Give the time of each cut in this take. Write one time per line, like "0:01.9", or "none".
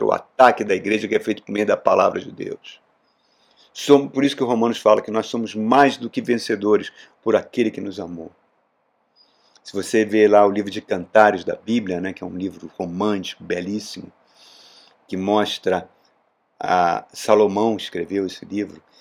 none